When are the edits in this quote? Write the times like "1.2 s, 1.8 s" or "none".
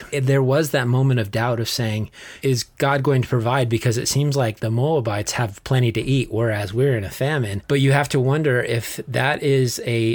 7.6 s